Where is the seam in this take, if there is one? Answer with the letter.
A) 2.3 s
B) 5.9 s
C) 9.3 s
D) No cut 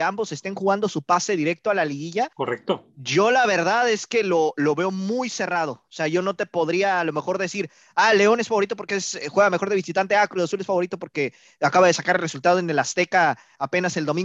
A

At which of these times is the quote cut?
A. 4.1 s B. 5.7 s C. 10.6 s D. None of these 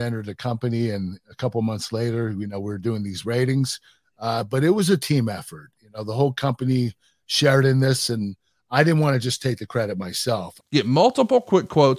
C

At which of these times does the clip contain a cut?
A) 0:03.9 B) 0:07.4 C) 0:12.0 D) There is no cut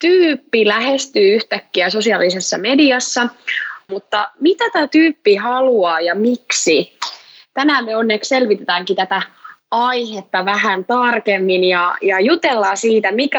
A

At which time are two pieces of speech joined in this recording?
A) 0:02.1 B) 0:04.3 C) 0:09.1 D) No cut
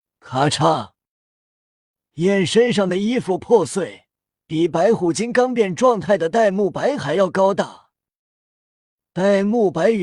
B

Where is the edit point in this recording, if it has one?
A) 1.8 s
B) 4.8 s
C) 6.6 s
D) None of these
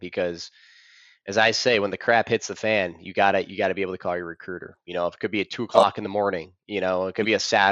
D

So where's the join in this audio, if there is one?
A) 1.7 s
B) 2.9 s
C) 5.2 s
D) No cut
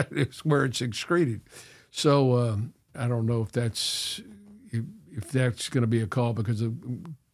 B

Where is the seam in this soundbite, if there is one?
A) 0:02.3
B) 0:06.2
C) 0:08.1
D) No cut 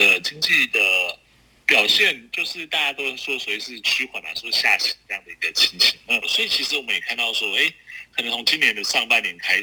B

